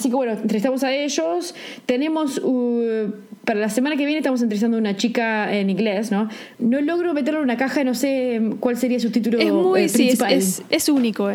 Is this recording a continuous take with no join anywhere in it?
no; 1 cut; at 6.5 s

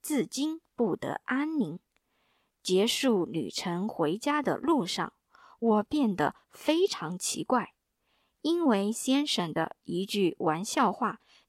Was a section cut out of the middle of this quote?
no; 0 cuts

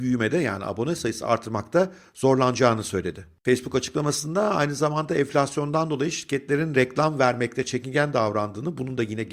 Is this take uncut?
yes; 0 cuts

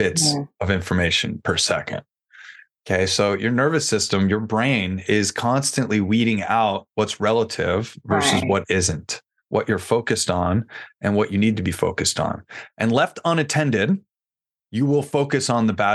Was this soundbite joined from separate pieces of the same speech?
no; 0 cuts

